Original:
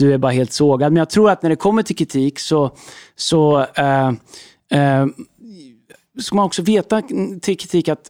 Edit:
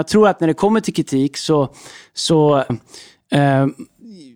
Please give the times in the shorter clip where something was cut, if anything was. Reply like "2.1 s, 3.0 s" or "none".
2.7 s